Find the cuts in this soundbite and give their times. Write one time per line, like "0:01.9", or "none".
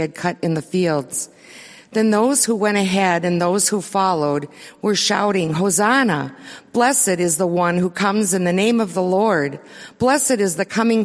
none